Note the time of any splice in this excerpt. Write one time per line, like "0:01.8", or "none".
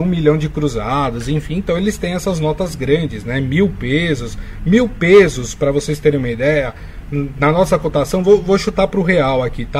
none